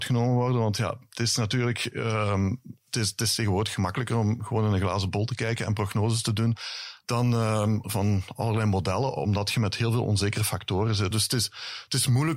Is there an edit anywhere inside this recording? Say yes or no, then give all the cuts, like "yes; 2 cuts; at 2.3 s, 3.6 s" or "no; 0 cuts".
yes; 2 cuts; at 7.8 s, 11.1 s